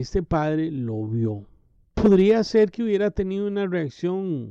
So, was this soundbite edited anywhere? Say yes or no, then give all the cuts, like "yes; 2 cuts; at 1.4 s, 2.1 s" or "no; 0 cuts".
no; 0 cuts